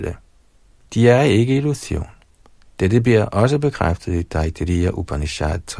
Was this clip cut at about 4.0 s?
no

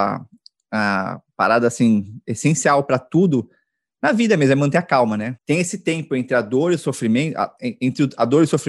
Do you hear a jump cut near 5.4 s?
yes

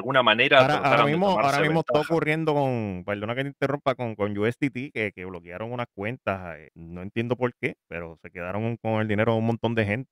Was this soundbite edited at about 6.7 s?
yes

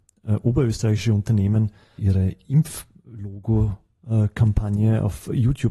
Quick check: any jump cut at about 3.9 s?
no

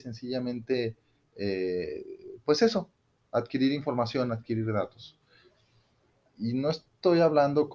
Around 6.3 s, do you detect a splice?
yes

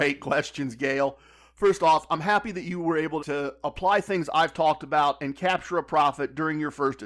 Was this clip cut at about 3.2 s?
yes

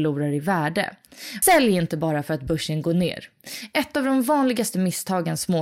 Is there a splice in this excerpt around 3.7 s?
no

